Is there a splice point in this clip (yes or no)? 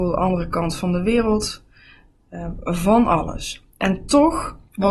no